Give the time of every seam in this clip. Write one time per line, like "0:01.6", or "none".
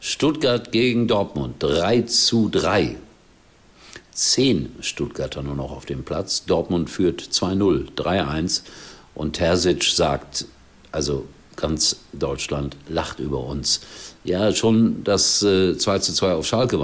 none

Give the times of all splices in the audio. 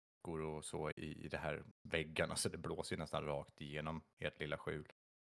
0:00.9

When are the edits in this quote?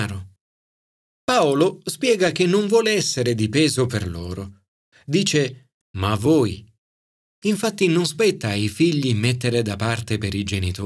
0:05.8

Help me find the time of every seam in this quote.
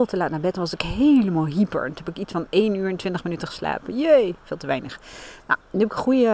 none

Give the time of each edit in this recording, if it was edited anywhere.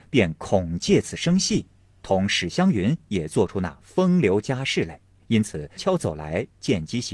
0:05.8

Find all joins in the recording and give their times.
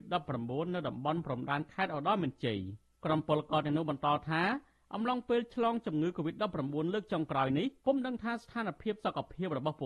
0:07.8

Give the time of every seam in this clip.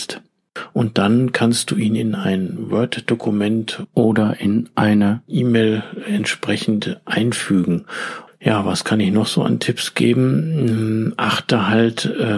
0:08.3

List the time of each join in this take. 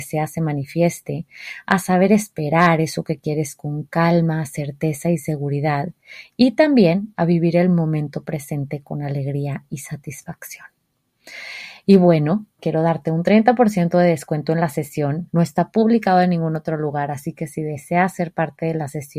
0:12.6
0:15.3

